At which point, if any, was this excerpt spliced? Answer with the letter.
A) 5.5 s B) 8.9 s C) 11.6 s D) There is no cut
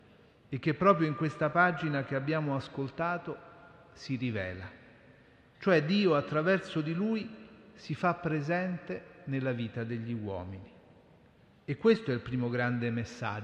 A